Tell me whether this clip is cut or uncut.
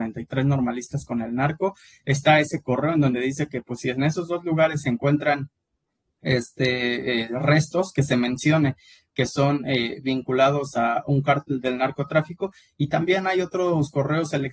uncut